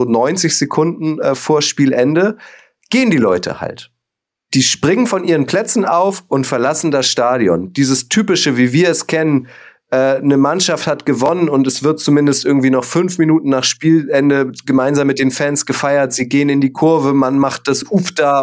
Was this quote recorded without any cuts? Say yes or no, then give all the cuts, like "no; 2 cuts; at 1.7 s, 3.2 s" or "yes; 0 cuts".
yes; 0 cuts